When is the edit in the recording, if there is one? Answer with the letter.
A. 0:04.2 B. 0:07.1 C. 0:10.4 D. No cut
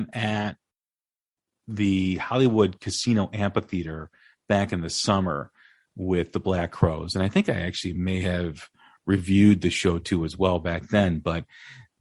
D